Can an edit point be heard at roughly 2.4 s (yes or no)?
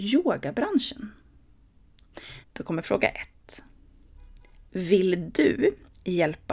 yes